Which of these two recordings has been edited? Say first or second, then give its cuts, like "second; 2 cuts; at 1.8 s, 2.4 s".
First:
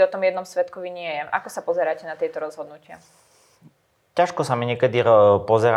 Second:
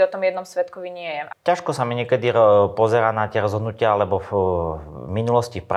second; 1 cut; at 1.3 s